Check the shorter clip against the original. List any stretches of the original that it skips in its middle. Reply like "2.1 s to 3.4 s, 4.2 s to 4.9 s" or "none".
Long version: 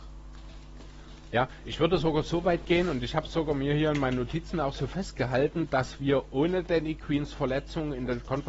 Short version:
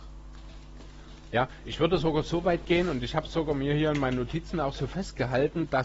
none